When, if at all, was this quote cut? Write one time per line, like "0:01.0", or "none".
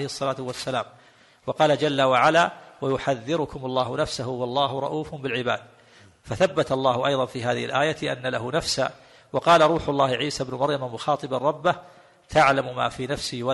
none